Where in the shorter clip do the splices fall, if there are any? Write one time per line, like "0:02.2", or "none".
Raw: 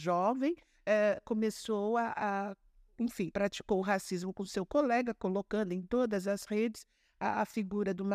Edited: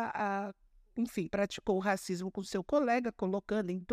none